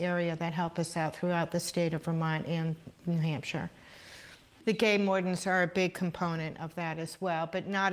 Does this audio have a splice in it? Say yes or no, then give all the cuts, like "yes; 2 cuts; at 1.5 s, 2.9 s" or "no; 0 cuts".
no; 0 cuts